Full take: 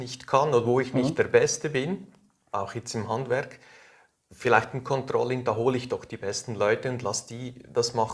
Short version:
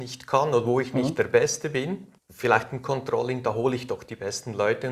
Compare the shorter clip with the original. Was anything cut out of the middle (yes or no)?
yes